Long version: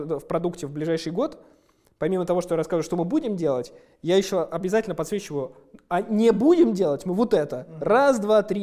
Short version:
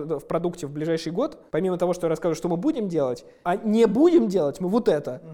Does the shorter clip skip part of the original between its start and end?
yes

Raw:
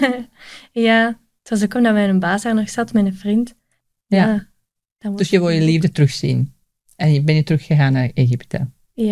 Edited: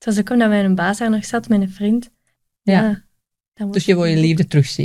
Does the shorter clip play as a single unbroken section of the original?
yes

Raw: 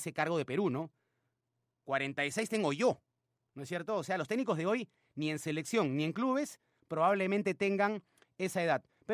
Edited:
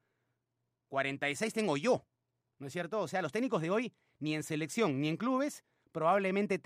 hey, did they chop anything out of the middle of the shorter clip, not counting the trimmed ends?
no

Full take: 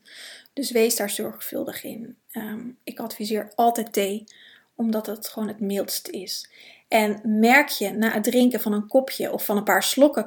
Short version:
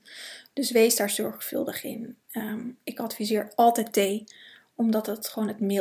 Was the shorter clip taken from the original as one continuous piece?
yes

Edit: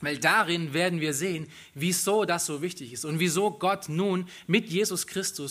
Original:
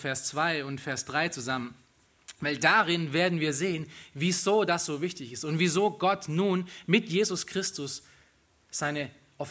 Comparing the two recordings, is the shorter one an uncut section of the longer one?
yes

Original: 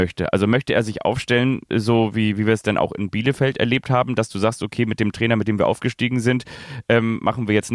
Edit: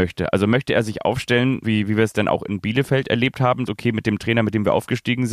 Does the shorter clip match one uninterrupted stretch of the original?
no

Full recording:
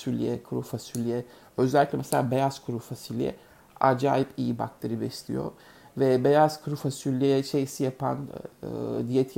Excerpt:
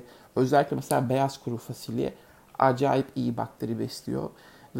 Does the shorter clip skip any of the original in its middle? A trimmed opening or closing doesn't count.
no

